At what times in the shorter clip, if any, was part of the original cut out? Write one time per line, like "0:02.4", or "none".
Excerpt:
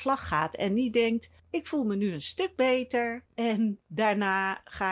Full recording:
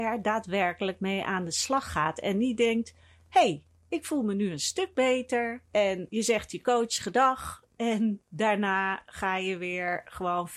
0:01.4
0:03.3